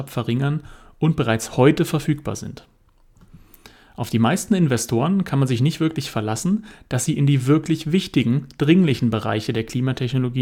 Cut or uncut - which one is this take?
uncut